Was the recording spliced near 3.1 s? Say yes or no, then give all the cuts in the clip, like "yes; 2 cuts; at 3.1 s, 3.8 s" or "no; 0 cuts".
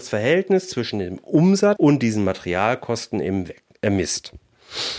no; 1 cut; at 1.8 s